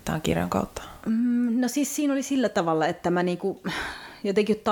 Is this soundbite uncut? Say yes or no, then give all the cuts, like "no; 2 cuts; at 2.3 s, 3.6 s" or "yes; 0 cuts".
yes; 0 cuts